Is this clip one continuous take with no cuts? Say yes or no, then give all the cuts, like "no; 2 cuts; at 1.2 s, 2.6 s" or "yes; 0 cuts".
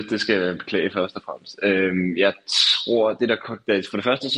yes; 0 cuts